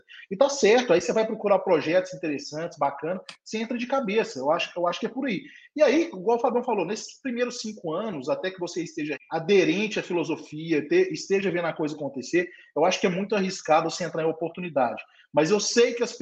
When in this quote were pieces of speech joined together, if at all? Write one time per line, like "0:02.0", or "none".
0:09.2